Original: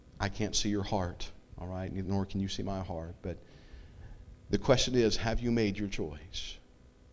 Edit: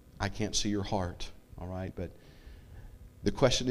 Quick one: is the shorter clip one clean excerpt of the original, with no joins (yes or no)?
no